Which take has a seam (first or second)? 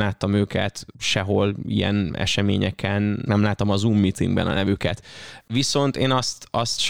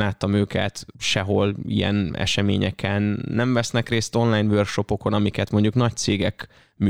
first